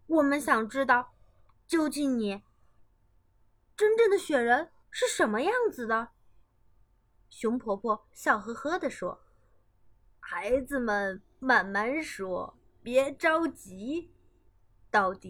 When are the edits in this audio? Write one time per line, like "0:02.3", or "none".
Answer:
0:04.8